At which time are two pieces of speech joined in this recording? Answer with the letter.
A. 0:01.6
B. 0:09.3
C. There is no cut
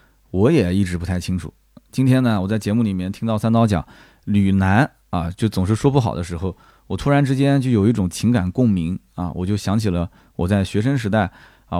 C